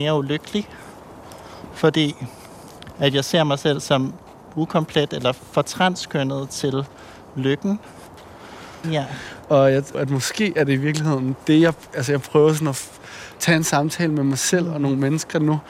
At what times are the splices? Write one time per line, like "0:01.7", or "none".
0:08.8
0:09.9